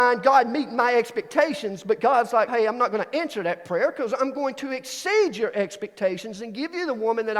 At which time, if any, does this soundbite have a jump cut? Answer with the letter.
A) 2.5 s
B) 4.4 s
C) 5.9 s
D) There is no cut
A